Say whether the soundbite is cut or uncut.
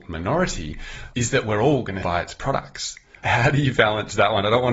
cut